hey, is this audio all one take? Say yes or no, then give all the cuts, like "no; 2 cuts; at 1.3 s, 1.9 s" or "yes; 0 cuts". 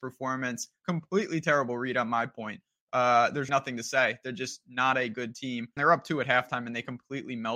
no; 2 cuts; at 3.5 s, 5.8 s